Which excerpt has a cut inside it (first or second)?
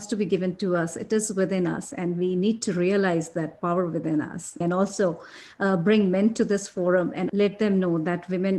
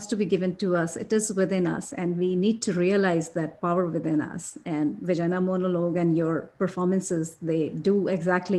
first